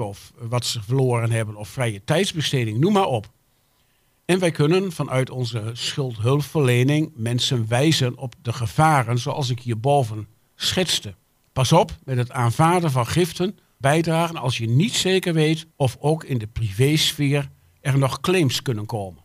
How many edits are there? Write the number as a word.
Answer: two